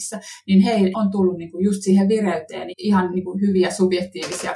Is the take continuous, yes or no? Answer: no